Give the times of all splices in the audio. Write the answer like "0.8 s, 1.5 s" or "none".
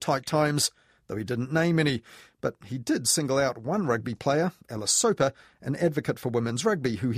none